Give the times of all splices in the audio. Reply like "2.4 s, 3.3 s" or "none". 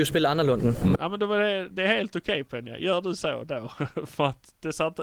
0.9 s